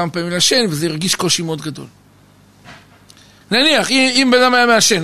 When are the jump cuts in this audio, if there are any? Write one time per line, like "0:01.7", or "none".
0:03.4